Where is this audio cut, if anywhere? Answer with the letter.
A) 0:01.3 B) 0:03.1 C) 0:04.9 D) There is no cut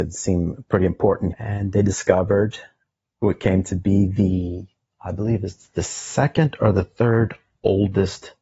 A